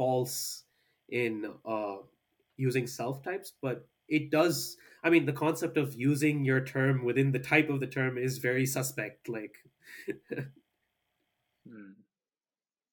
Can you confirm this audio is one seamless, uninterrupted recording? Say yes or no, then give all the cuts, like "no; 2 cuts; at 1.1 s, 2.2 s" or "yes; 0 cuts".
yes; 0 cuts